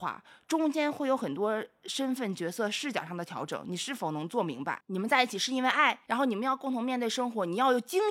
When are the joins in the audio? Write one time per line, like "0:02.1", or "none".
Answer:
0:04.8
0:06.1